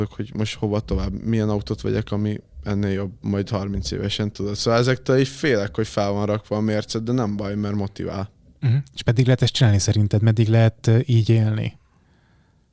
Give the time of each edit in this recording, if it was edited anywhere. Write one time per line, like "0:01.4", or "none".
none